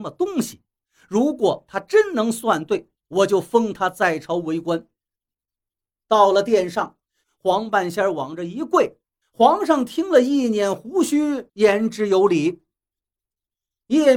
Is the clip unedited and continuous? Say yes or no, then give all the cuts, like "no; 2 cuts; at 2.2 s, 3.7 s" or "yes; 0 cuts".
no; 3 cuts; at 7.2 s, 9.2 s, 11.5 s